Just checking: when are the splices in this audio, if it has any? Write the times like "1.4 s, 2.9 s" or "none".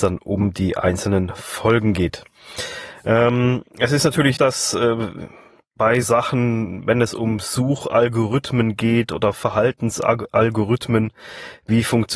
4.4 s, 6.0 s